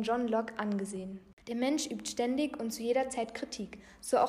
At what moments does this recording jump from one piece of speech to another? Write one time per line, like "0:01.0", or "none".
0:01.4